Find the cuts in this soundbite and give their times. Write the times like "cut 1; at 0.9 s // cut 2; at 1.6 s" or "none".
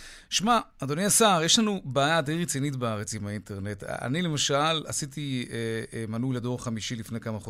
none